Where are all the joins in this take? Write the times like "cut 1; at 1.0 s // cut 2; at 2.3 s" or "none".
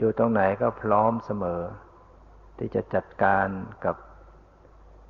cut 1; at 2.5 s